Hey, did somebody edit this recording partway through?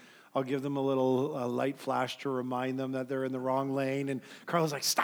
no; 0 cuts

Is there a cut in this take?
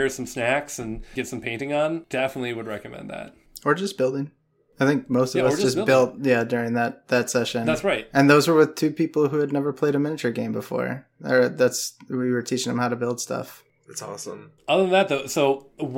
no; 0 cuts

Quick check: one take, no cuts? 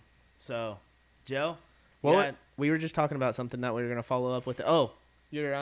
yes; 0 cuts

